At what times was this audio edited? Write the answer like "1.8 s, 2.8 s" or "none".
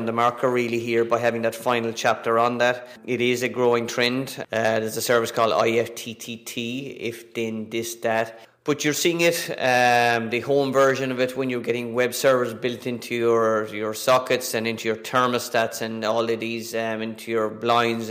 4.4 s

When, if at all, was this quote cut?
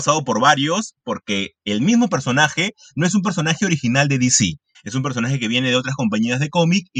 4.7 s

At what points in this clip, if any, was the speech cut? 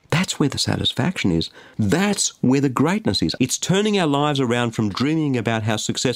1.7 s, 3.4 s

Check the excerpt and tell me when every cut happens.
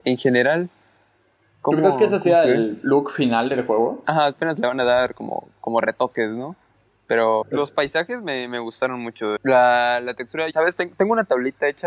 7.4 s, 9.4 s, 10.5 s

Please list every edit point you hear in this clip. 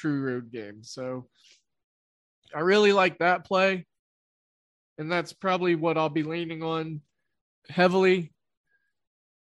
none

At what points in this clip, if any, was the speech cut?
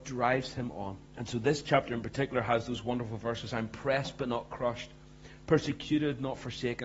1.1 s

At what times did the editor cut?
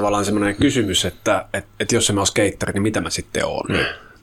none

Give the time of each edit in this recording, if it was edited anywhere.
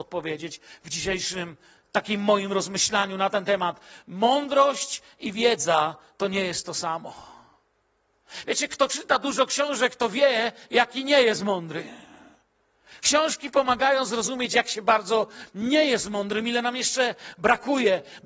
8.4 s

